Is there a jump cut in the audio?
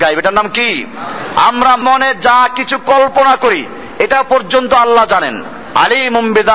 yes; 1 cut; at 1.8 s

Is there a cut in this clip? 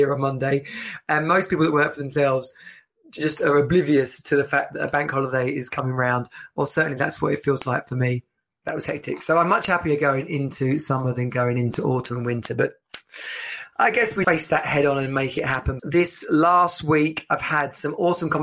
yes; 3 cuts; at 8.6 s, 14.2 s, 15.8 s

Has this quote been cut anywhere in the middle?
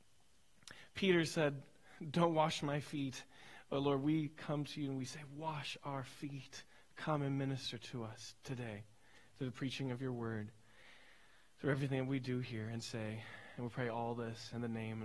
no; 0 cuts

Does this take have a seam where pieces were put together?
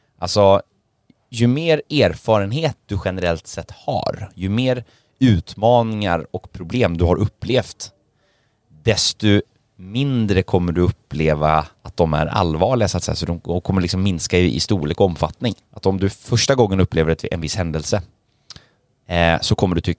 yes; 2 cuts; at 11.7 s, 15.6 s

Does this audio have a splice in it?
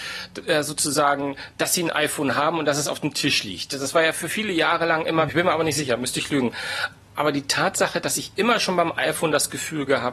yes; 1 cut; at 5.3 s

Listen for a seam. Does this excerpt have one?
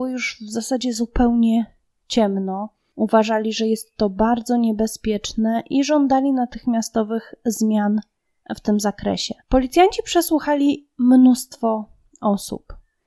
yes; 1 cut; at 9.4 s

